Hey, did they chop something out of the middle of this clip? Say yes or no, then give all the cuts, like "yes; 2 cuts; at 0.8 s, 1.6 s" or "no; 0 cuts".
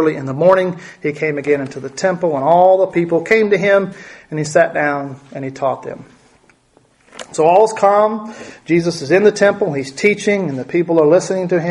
no; 0 cuts